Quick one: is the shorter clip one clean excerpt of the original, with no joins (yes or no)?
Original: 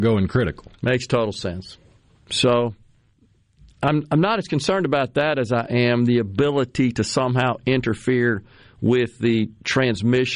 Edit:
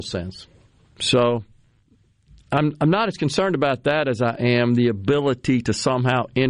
yes